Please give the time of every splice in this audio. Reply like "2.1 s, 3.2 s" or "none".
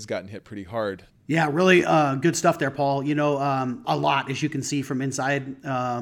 1.1 s, 3.8 s